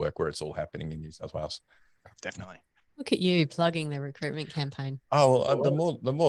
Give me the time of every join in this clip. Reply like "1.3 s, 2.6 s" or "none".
2.1 s